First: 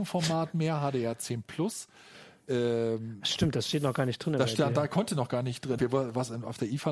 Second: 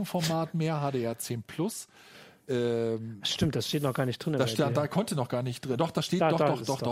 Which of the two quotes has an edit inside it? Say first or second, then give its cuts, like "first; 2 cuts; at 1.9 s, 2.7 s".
first; 1 cut; at 5.8 s